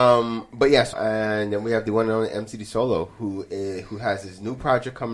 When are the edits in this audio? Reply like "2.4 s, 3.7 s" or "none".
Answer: 0.9 s